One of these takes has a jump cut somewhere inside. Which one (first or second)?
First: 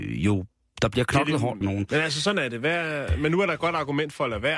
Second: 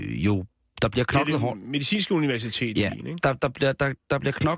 first